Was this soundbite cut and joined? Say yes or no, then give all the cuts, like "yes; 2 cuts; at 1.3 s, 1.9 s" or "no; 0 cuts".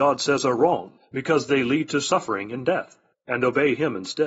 no; 0 cuts